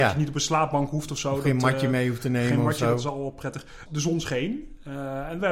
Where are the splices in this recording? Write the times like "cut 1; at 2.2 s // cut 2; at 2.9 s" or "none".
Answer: cut 1; at 3.9 s